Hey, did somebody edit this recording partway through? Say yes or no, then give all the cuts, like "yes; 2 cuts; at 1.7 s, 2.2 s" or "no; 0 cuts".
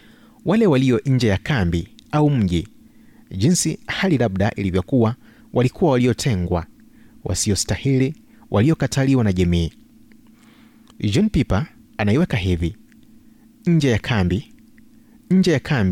yes; 1 cut; at 8.3 s